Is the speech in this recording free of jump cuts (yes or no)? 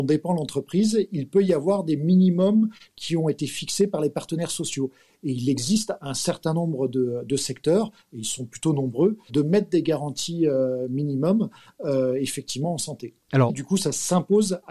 no